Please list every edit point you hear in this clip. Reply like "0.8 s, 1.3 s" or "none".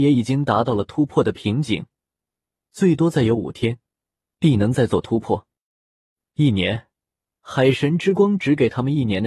none